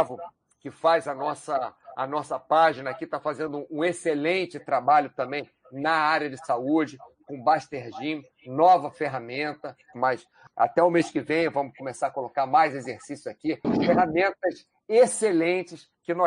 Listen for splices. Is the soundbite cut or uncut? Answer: cut